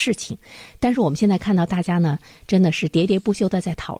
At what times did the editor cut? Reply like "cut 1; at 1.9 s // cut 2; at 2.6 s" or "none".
none

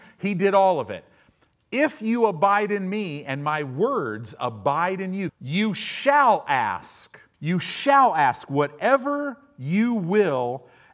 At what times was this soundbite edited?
cut 1; at 5.3 s // cut 2; at 7.3 s

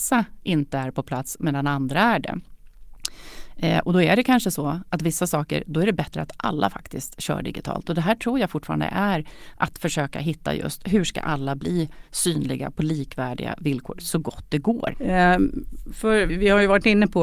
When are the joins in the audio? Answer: cut 1; at 14.9 s // cut 2; at 16.3 s

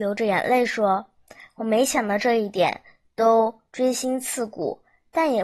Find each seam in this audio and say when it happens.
none

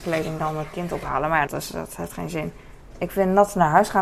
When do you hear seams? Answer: cut 1; at 1.5 s

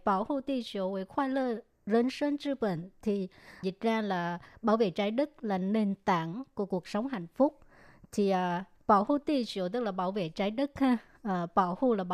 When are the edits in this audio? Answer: cut 1; at 3.6 s

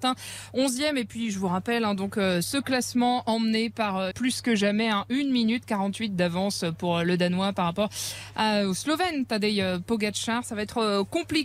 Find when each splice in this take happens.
cut 1; at 4.1 s

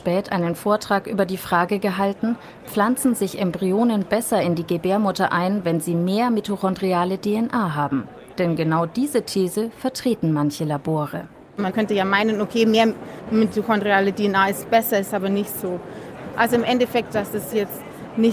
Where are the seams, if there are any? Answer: cut 1; at 17.1 s

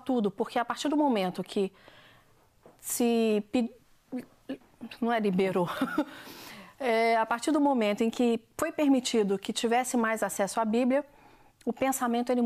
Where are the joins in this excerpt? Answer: none

